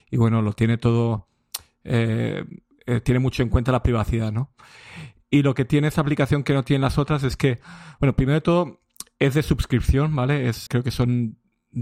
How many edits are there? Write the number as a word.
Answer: two